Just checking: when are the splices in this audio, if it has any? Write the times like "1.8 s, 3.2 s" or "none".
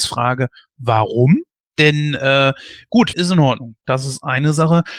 3.1 s